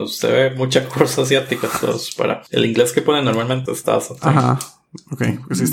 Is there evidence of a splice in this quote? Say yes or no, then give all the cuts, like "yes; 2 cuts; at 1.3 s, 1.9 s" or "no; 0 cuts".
yes; 1 cut; at 3.7 s